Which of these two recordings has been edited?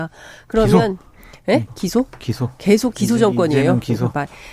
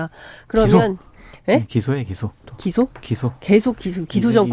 first; 2 cuts; at 1.7 s, 2.9 s

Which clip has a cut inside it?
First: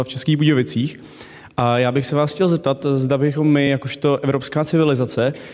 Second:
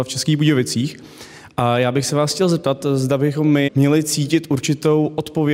second; 1 cut; at 3.7 s

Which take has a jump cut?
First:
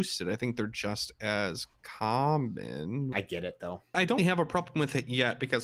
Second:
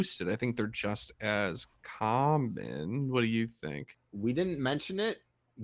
first; 2 cuts; at 3.1 s, 4.2 s

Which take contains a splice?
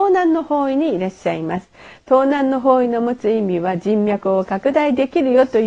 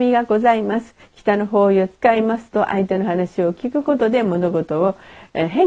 second; 1 cut; at 1.0 s

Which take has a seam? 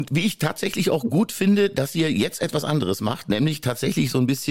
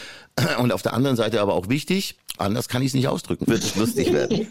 second; 2 cuts; at 2.3 s, 3.4 s

